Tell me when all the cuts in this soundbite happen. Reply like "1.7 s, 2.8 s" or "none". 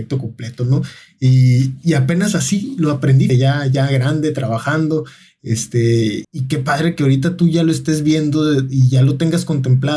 3.3 s, 6.2 s